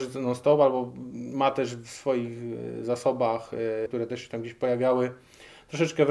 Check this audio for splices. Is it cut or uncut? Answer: cut